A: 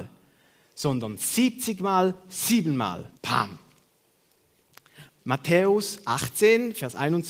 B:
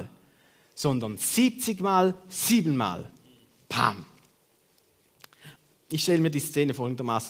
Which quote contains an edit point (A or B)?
A